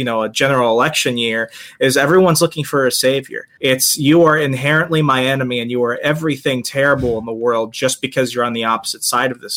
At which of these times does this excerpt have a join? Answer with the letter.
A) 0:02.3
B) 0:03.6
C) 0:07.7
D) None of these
B